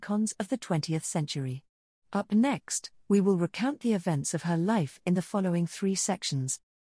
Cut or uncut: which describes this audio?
cut